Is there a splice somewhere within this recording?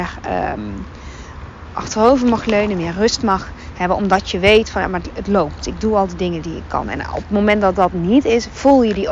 yes; 1 cut; at 1.7 s

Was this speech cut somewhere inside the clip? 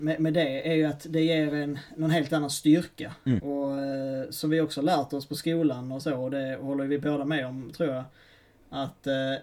no; 0 cuts

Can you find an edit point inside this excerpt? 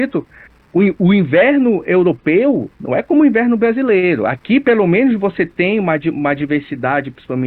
yes; 1 cut; at 2.7 s

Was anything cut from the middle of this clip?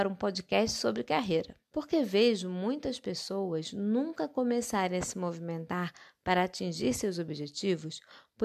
yes; 1 cut; at 1.6 s

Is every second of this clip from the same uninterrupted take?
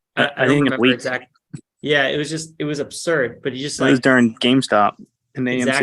yes; 0 cuts

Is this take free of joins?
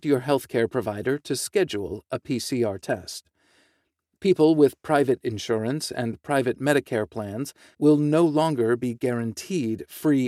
no; 1 cut; at 7.7 s

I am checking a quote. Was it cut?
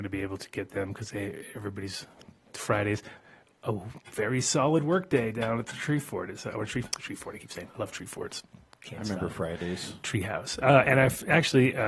no; 0 cuts

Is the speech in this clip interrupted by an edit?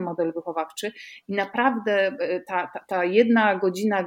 no; 0 cuts

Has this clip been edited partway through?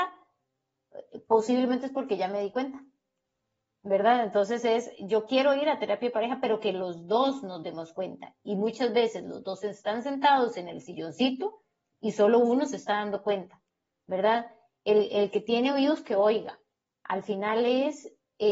no; 0 cuts

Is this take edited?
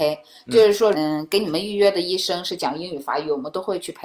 yes; 1 cut; at 0.9 s

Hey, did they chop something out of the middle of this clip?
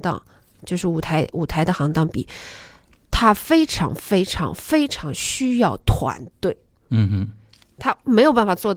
no; 0 cuts

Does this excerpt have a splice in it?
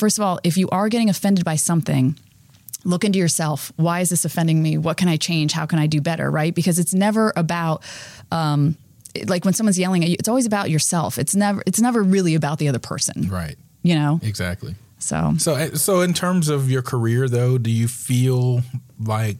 no; 0 cuts

